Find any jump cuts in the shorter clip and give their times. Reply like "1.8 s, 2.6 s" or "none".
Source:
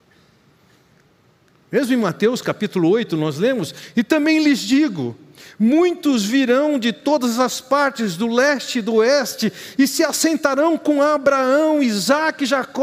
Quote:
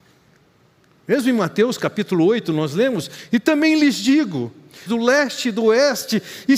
4.9 s